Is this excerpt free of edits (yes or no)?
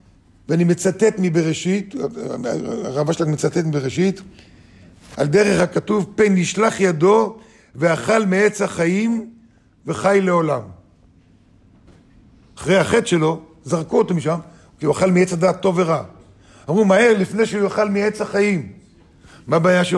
yes